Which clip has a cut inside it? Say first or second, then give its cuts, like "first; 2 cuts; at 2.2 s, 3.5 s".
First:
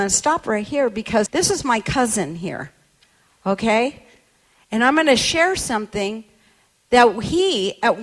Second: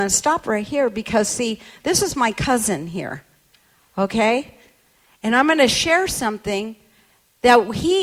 first; 1 cut; at 1.3 s